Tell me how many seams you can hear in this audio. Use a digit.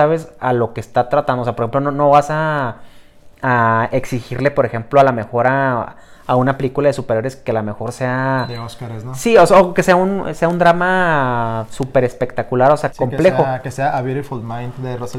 1